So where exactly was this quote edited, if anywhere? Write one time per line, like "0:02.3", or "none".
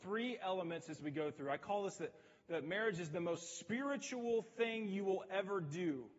none

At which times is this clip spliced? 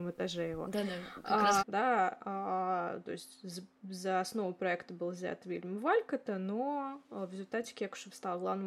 0:01.6

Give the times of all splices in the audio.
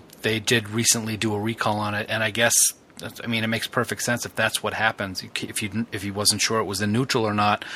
none

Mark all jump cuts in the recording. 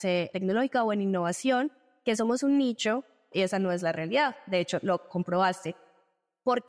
0:03.3

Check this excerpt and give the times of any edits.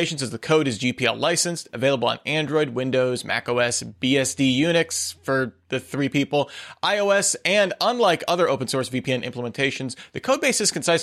none

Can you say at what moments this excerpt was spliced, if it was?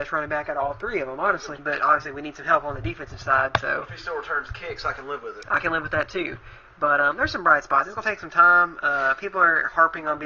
0:01.6

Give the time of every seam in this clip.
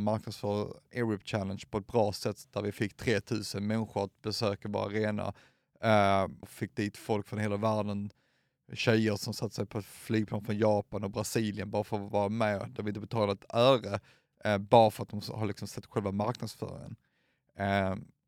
0:06.4

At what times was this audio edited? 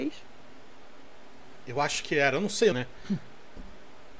0:02.7

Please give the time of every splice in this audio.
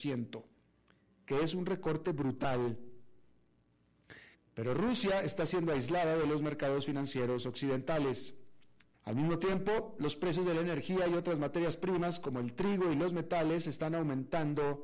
0:04.3
0:08.9

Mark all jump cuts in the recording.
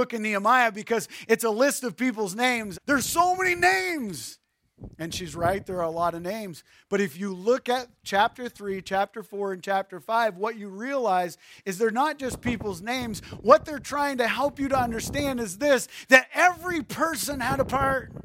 0:02.7

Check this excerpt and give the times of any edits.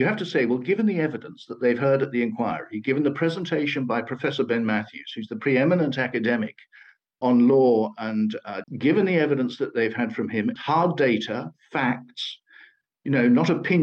0:08.6
0:10.6

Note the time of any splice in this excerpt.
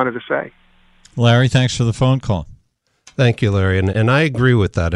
0:03.9

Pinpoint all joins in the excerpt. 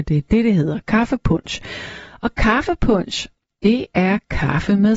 none

